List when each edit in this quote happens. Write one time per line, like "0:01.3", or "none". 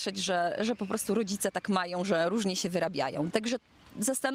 0:03.3